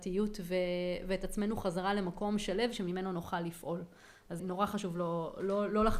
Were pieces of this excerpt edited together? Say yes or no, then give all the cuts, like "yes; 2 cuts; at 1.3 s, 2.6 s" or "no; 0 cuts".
yes; 1 cut; at 4.4 s